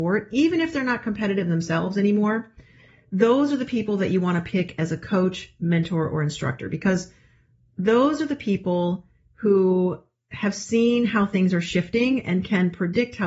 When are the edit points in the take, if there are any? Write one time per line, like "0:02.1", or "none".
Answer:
none